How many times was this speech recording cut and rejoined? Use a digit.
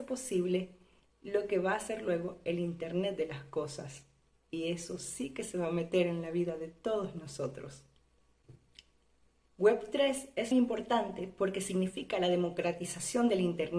1